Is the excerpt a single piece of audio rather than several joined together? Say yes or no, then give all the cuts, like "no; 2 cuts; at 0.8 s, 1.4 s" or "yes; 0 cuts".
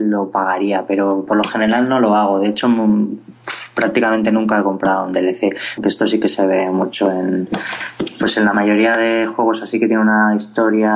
no; 1 cut; at 5.8 s